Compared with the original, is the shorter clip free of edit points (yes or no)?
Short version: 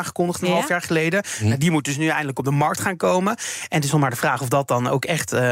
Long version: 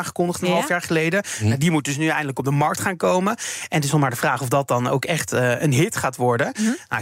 yes